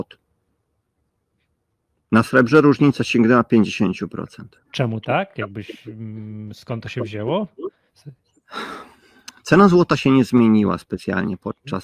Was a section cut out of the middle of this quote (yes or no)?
no